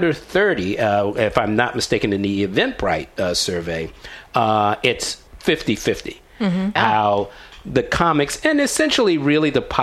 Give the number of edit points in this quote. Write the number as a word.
two